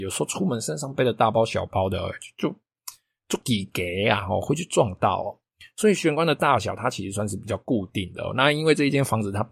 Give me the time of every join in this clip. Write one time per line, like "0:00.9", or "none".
none